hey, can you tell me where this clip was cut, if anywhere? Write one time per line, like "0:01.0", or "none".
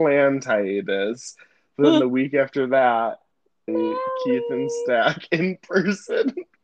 0:03.7